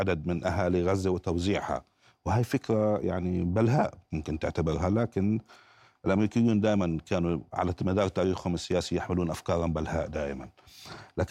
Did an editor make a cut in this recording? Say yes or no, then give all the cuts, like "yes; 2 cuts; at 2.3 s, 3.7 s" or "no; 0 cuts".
no; 0 cuts